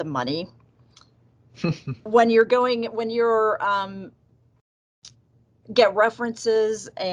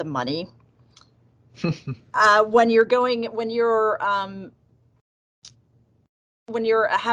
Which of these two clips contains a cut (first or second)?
first